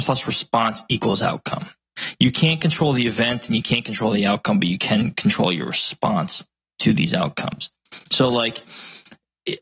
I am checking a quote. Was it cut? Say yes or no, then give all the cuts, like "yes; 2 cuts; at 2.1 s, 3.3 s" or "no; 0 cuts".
no; 0 cuts